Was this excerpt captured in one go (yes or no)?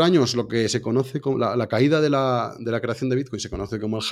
yes